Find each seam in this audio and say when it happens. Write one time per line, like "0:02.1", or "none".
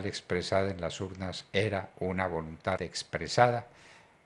0:02.8